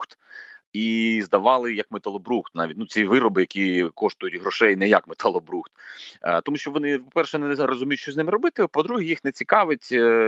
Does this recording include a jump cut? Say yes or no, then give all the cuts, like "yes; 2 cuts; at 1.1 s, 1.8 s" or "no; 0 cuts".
no; 0 cuts